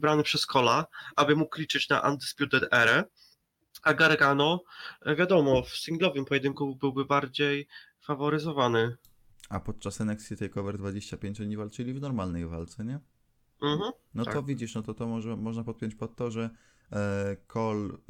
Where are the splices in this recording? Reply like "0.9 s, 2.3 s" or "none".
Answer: none